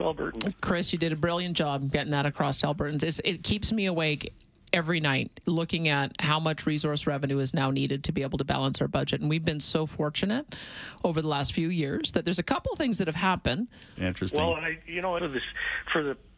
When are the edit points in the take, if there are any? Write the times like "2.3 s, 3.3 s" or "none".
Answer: 14.0 s, 15.2 s